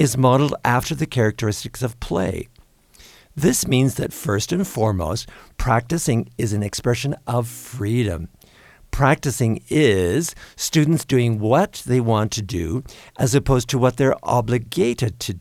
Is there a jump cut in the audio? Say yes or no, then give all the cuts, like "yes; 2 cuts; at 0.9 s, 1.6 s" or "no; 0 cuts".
no; 0 cuts